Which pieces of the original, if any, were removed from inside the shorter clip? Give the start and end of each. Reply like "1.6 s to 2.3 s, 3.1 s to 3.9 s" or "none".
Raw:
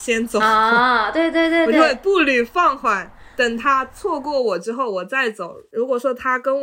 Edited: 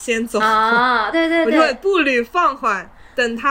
1.1 s to 1.3 s